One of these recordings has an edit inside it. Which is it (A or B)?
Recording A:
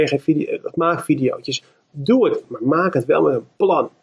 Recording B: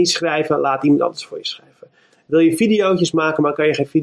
A